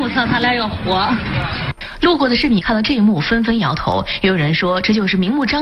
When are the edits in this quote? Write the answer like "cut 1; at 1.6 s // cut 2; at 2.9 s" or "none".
none